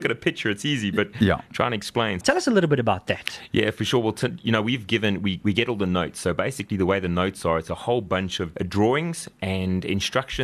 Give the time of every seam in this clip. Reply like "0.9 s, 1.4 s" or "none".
2.2 s, 8.5 s